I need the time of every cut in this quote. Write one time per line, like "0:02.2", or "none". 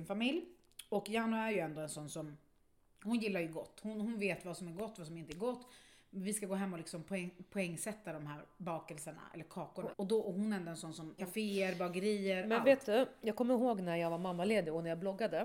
0:09.9
0:11.2